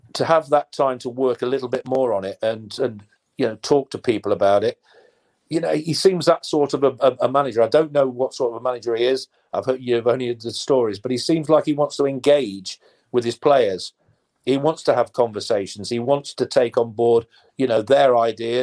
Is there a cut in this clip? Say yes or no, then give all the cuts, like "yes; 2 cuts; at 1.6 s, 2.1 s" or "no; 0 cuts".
no; 0 cuts